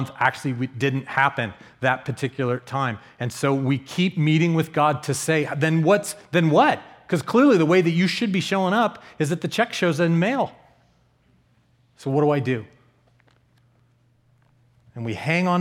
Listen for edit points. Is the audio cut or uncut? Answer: uncut